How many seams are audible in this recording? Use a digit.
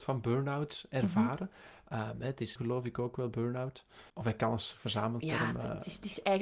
2